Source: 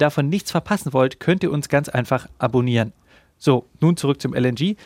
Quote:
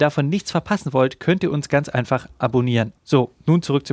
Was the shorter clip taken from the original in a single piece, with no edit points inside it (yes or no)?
no